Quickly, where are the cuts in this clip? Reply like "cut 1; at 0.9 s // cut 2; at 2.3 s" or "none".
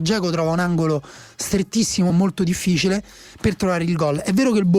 cut 1; at 2.1 s